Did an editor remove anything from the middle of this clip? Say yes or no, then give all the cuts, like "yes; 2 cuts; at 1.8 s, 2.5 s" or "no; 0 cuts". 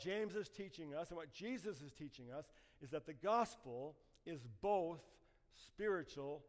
no; 0 cuts